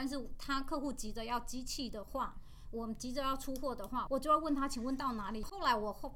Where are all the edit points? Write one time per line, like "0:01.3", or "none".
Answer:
0:04.1